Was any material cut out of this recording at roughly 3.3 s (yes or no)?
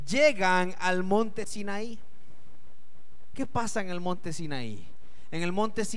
yes